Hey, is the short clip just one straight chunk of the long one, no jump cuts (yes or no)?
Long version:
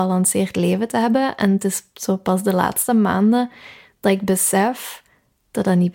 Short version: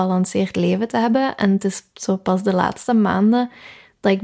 yes